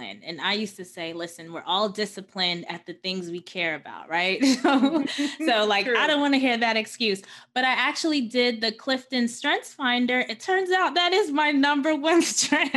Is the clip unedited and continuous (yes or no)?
yes